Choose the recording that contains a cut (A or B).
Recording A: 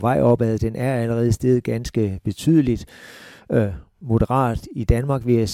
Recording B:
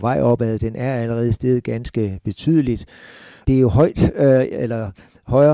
B